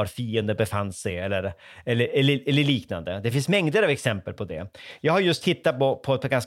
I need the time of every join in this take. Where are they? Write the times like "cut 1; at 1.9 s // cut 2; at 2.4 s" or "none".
none